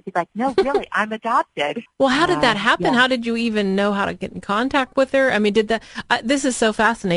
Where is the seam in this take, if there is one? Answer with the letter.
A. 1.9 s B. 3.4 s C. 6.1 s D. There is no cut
A